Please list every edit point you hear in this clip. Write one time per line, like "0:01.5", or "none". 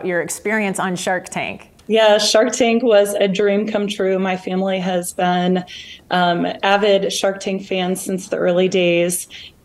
0:01.8